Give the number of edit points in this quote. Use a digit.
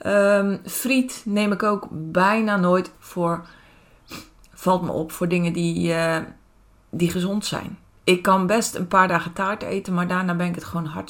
1